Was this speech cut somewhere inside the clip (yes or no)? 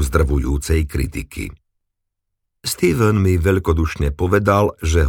no